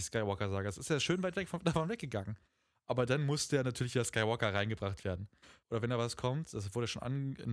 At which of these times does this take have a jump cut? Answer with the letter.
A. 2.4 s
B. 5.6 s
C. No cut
B